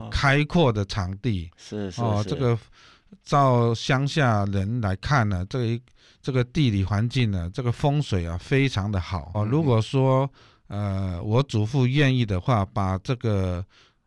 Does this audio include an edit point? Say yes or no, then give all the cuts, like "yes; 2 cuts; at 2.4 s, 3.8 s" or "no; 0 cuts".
yes; 1 cut; at 9.3 s